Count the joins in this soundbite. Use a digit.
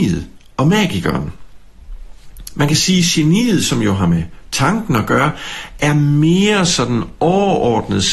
0